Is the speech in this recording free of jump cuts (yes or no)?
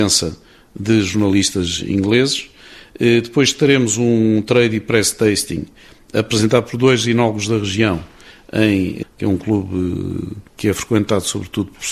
no